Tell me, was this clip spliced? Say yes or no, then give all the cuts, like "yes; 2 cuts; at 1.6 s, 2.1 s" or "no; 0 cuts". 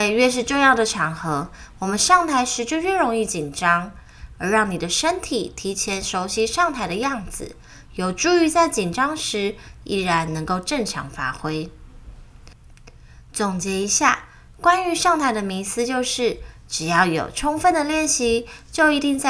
no; 0 cuts